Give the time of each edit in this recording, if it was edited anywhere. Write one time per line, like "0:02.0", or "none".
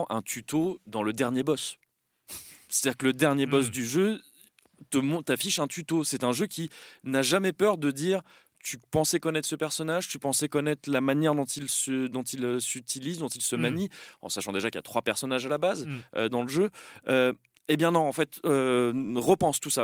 none